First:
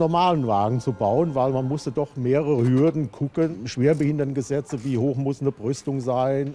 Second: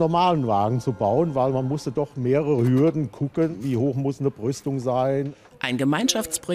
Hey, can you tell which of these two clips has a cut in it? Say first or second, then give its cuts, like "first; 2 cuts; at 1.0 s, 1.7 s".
second; 2 cuts; at 3.6 s, 5.5 s